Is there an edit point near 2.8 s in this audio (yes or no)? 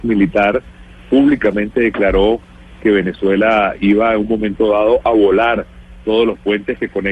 no